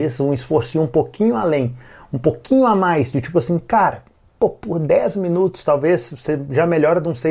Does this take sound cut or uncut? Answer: uncut